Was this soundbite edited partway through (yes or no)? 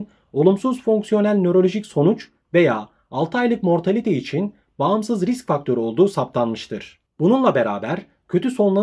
yes